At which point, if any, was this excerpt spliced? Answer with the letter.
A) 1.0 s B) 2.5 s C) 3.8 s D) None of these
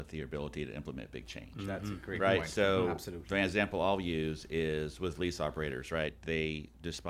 D